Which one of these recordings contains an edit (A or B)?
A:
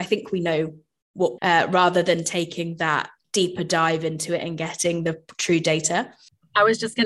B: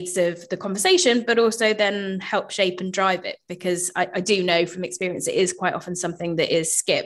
A